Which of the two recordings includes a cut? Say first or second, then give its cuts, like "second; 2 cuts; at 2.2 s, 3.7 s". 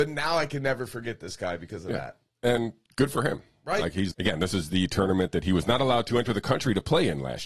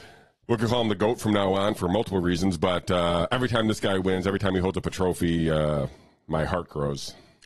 first; 1 cut; at 4.1 s